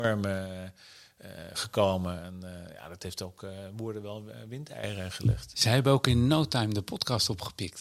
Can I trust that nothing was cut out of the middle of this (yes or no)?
no